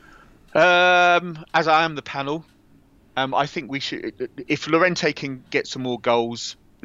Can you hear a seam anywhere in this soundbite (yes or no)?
no